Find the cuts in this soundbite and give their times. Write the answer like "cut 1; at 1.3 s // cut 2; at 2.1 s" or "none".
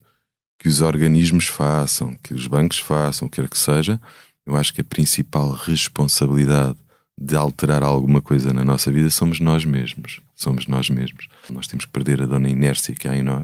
cut 1; at 11.5 s